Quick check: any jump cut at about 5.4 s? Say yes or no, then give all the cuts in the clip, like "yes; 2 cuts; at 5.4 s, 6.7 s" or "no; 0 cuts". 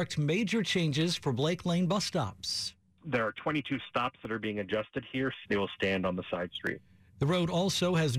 yes; 1 cut; at 5.4 s